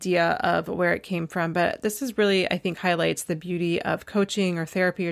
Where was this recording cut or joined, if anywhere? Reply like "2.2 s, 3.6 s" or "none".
none